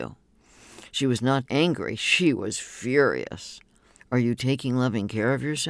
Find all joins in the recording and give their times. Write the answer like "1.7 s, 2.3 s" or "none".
1.5 s, 4.0 s